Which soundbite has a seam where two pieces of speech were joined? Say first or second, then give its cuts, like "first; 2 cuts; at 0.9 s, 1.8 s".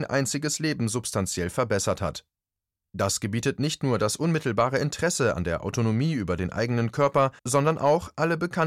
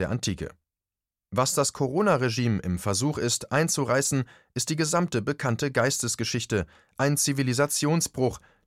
first; 2 cuts; at 2.8 s, 7.4 s